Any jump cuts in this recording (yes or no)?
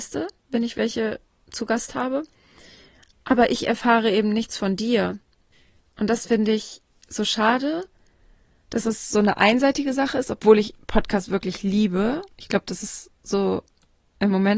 no